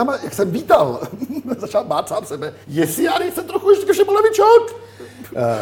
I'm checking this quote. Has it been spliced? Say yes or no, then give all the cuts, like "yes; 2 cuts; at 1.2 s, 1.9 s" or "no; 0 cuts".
yes; 1 cut; at 2.6 s